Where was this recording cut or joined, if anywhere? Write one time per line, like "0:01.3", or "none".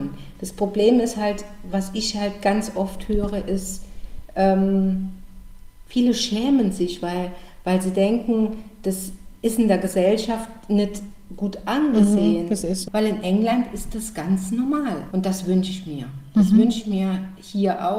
0:12.9
0:15.1